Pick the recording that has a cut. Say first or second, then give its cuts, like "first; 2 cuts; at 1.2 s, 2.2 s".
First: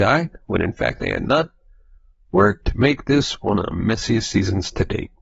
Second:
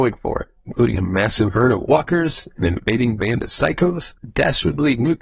second; 1 cut; at 4.2 s